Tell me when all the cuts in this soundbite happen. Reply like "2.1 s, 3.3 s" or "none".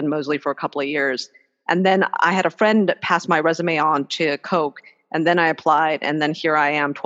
none